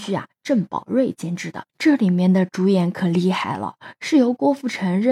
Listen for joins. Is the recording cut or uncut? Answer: cut